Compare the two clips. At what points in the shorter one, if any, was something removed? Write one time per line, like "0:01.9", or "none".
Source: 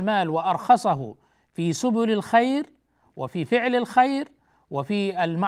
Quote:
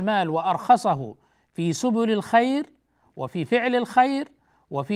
none